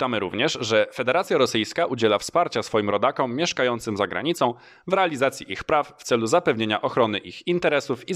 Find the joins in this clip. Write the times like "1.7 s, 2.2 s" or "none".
none